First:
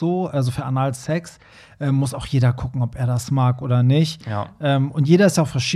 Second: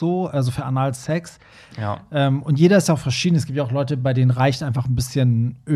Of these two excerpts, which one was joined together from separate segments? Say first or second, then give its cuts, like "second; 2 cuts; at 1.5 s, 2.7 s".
second; 1 cut; at 1.7 s